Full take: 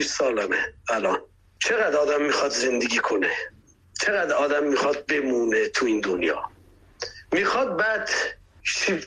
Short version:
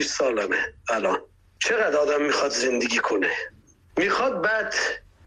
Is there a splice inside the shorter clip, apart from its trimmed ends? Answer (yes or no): yes